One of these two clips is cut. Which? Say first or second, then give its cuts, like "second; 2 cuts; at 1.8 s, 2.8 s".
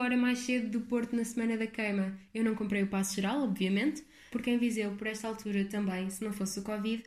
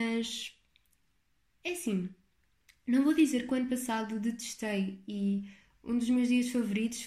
first; 1 cut; at 4.3 s